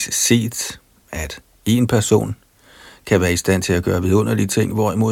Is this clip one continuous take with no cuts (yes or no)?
yes